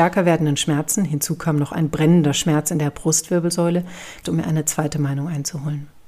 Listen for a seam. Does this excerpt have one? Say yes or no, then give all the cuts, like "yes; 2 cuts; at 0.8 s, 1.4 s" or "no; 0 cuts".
yes; 1 cut; at 4.2 s